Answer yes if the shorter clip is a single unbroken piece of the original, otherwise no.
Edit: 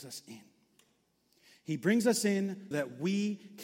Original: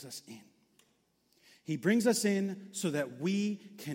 no